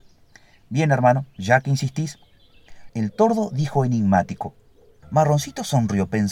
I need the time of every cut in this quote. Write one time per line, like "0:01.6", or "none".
0:02.9
0:05.0